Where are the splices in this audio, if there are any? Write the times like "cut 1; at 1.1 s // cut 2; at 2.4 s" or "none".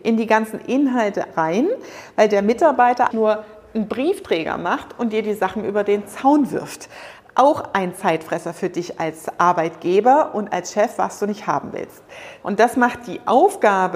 cut 1; at 3.1 s // cut 2; at 12.4 s